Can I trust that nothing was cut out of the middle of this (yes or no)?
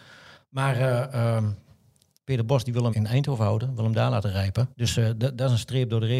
no